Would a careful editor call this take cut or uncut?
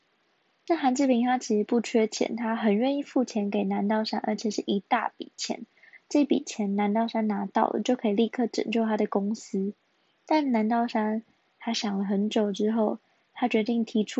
uncut